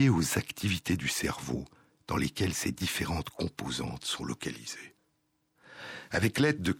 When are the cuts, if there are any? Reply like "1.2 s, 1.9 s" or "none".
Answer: none